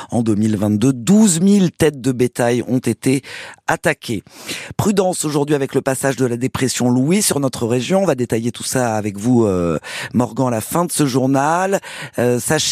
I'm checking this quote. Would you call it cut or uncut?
uncut